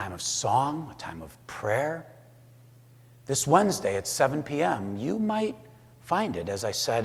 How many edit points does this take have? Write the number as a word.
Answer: zero